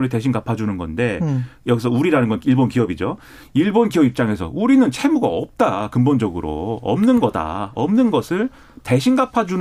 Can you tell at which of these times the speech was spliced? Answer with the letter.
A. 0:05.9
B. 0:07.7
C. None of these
C